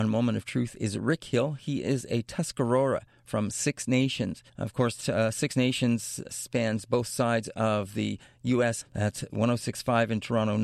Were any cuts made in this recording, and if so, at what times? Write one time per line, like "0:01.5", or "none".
0:04.5
0:06.0
0:08.8